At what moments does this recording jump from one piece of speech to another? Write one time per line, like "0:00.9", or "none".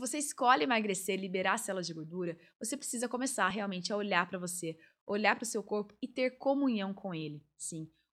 none